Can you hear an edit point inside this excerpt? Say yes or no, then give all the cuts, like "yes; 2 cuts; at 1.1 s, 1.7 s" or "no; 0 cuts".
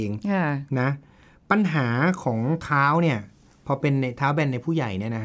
no; 0 cuts